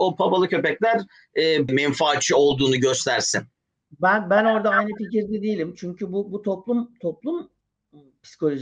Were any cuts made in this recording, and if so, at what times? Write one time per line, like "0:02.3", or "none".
0:01.7